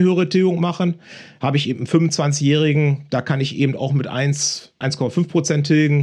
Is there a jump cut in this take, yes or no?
yes